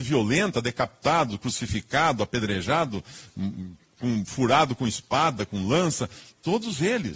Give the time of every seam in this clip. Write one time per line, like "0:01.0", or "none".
none